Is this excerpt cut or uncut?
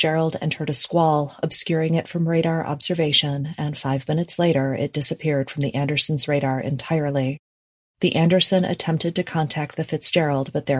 uncut